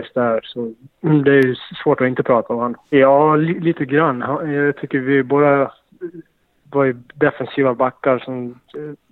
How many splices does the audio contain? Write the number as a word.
one